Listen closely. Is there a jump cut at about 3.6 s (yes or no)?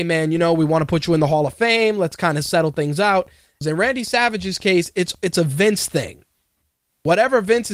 yes